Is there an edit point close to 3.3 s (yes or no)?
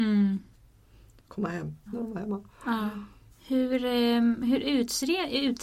yes